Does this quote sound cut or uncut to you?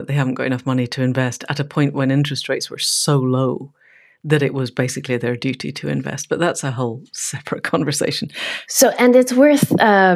uncut